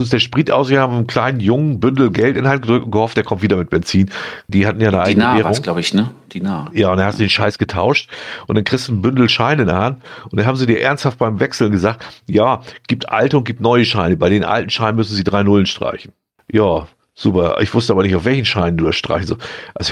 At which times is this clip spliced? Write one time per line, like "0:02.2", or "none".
0:04.5
0:16.4